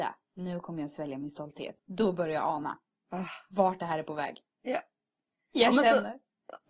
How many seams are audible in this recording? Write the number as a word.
one